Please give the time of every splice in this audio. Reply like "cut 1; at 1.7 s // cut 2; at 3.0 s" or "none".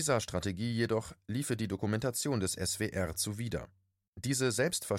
cut 1; at 4.1 s